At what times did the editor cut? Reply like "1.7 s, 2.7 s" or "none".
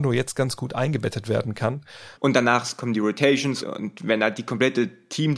2.1 s, 3.6 s